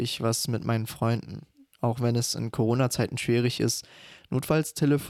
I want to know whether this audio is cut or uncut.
uncut